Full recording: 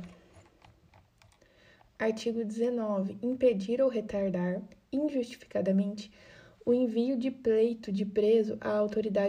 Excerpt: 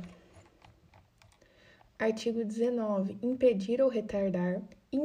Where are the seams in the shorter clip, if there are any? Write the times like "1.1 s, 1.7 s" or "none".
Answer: none